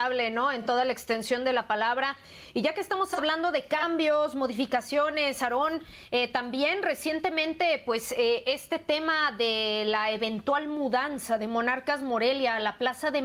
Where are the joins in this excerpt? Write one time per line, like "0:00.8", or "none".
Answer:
none